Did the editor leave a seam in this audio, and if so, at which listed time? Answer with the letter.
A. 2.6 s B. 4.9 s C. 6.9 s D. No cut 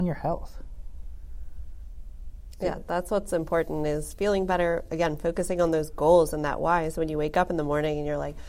D